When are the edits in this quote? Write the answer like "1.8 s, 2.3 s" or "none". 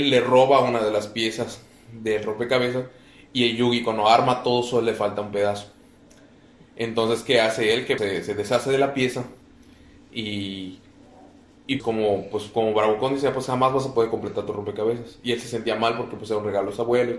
8.0 s, 11.8 s